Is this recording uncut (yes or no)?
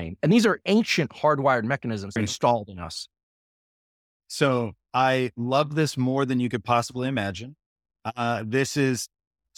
no